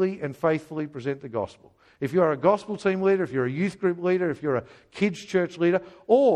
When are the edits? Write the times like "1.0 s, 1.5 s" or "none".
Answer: none